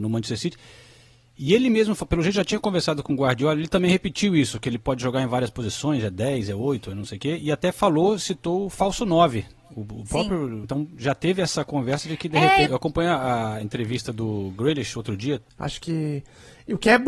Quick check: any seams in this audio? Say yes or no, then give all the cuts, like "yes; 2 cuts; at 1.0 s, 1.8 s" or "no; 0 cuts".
yes; 3 cuts; at 10.6 s, 12.7 s, 15.5 s